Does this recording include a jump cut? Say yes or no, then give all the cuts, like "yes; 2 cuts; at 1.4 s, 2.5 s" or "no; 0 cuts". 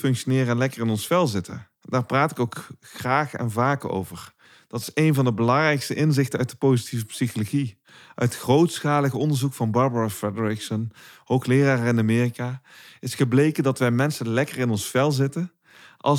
no; 0 cuts